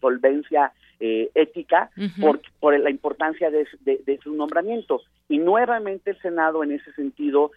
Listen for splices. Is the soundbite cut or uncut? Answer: uncut